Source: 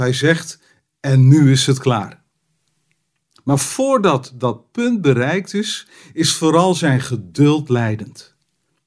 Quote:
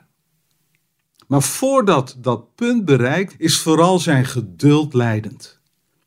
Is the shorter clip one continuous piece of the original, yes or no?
no